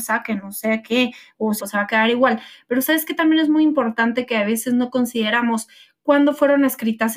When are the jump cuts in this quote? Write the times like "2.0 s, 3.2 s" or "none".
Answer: 1.6 s